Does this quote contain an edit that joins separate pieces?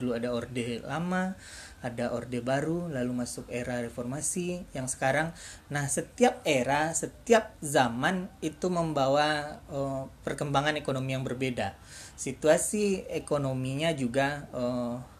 no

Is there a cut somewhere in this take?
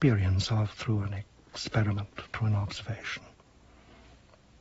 yes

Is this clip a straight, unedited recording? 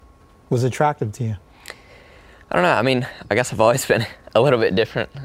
yes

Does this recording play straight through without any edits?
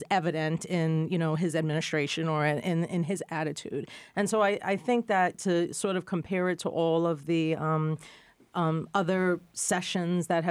yes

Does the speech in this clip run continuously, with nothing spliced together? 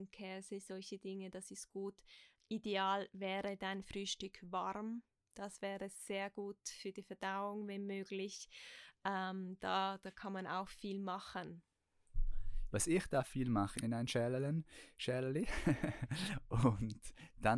no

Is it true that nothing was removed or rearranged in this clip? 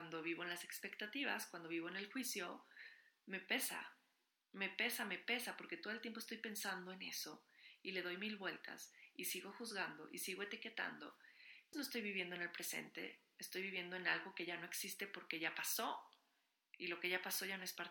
no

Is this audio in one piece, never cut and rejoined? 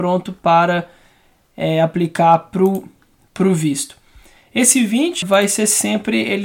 no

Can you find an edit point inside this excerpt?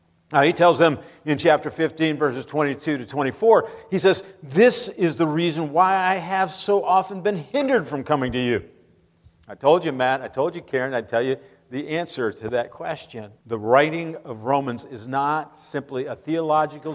yes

